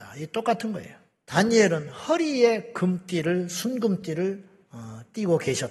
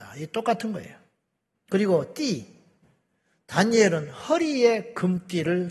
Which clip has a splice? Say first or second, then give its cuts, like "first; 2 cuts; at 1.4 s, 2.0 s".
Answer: first; 1 cut; at 1.2 s